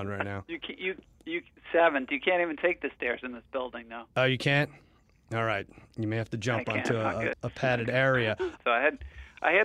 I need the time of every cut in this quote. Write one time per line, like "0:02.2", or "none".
0:07.3
0:08.6